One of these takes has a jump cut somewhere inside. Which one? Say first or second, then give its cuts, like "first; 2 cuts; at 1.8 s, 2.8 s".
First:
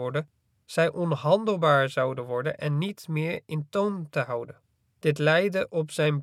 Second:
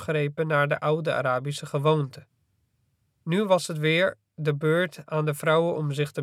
first; 1 cut; at 4.9 s